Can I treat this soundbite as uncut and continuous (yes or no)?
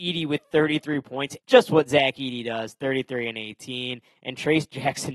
no